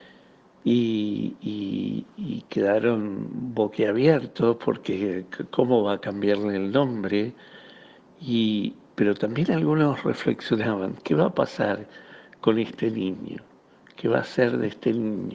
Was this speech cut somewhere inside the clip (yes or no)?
no